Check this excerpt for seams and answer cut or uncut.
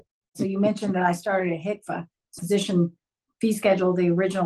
cut